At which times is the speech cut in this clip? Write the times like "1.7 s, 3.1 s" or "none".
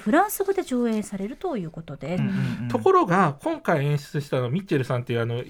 2.2 s